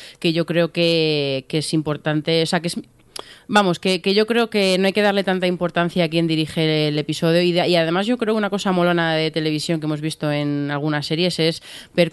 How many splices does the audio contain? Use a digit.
0